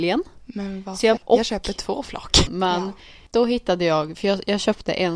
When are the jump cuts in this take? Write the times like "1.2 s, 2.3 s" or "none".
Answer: 1.2 s, 2.5 s